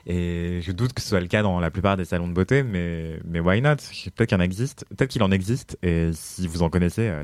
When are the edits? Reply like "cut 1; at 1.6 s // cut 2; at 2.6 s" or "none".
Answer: none